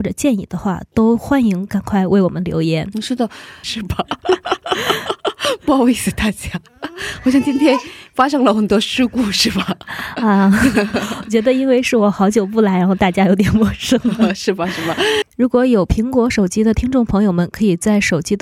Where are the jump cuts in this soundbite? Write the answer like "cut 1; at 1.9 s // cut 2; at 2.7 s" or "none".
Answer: cut 1; at 3.6 s // cut 2; at 15.2 s